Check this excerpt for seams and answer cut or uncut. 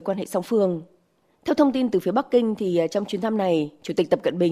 uncut